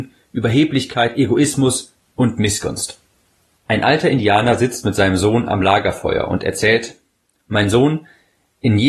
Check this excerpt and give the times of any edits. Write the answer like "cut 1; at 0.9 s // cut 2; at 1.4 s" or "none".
cut 1; at 3.5 s